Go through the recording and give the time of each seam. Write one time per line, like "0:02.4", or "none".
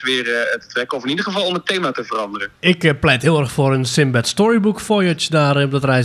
0:02.6